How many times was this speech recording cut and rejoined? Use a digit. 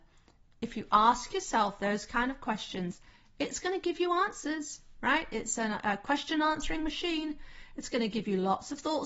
0